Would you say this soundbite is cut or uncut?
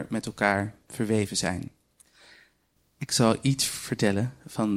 cut